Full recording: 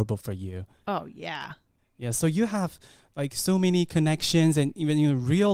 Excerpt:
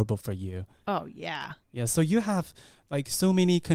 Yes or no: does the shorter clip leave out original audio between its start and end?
yes